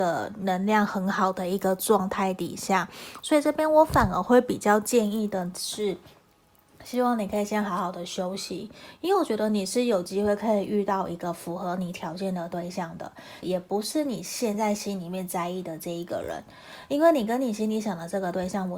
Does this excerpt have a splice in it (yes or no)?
yes